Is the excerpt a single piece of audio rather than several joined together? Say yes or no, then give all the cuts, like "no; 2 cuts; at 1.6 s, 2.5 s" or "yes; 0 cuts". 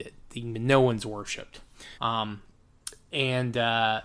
no; 1 cut; at 2.0 s